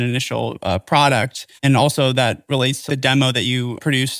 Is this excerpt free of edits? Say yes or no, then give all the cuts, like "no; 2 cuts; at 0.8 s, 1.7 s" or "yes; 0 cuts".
no; 2 cuts; at 1.6 s, 2.9 s